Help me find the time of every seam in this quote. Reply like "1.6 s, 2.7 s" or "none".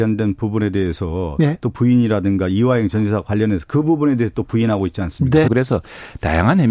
5.5 s

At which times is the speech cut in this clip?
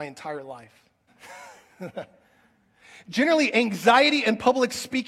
1.1 s

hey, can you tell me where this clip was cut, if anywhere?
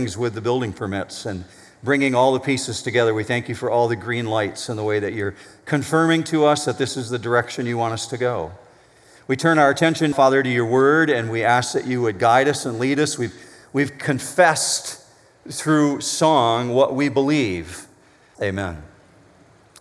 10.1 s, 18.3 s

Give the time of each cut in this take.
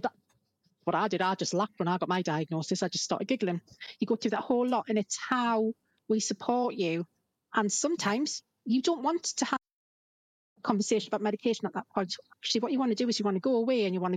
none

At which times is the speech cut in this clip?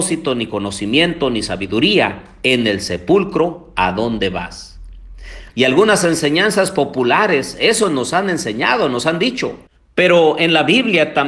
5.5 s

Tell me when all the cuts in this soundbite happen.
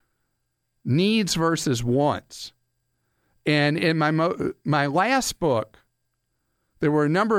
none

